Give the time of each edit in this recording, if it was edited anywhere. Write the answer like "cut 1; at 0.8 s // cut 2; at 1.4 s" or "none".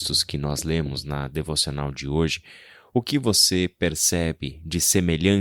none